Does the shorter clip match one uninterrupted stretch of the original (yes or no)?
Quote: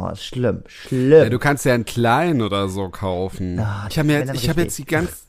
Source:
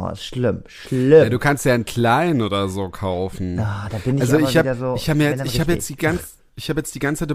no